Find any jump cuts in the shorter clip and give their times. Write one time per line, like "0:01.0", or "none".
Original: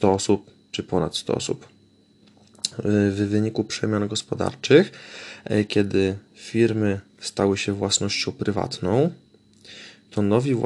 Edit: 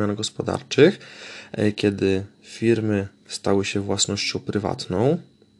none